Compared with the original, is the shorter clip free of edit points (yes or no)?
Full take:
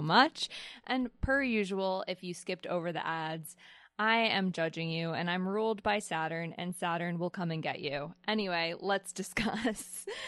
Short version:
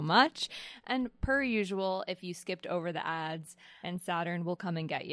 no